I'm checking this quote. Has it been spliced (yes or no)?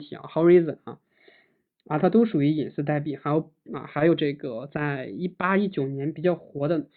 no